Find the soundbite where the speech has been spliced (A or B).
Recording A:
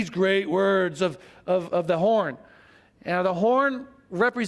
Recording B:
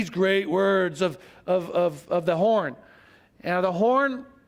A